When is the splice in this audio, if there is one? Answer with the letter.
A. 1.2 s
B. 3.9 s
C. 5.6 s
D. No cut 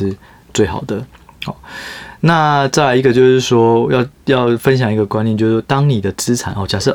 D